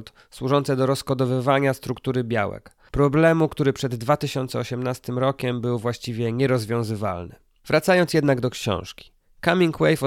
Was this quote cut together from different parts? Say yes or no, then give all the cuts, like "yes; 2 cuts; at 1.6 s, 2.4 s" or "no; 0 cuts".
no; 0 cuts